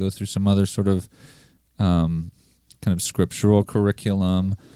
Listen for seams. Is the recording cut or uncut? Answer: uncut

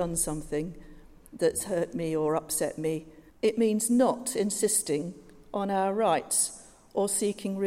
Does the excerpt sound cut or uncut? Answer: cut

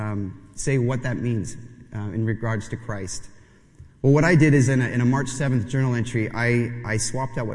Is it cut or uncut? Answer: uncut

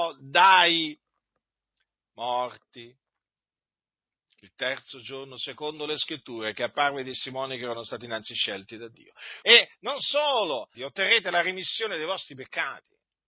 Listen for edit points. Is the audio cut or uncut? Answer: cut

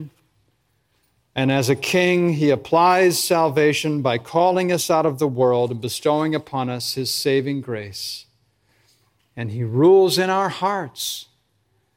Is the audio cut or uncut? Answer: uncut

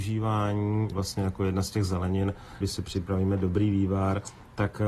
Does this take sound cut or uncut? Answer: cut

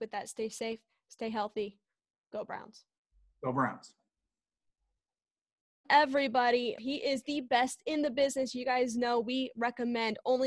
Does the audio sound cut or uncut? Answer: cut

